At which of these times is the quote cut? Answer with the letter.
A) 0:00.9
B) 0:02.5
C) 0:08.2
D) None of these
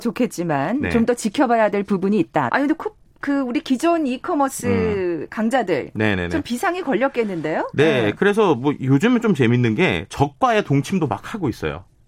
B